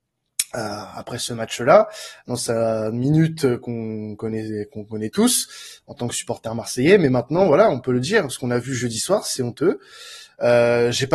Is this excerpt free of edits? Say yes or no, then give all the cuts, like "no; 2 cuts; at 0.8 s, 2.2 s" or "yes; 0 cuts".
yes; 0 cuts